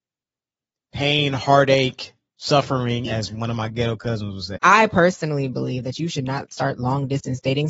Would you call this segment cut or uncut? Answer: cut